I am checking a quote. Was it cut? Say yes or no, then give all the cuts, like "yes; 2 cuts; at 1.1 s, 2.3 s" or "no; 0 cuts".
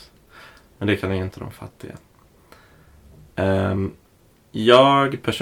no; 0 cuts